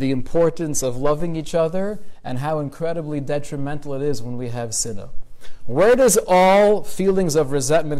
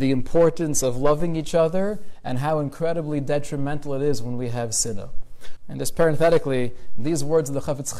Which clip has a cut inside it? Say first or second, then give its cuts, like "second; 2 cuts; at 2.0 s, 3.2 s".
second; 1 cut; at 5.6 s